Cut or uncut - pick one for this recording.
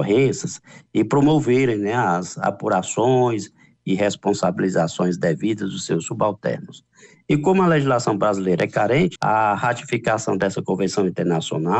cut